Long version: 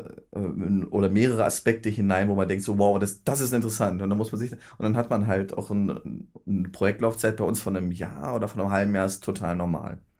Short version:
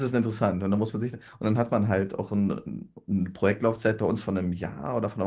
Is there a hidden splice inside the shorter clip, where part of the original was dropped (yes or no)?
no